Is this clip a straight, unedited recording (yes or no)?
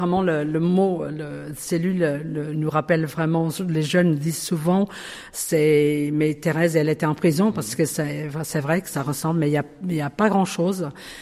yes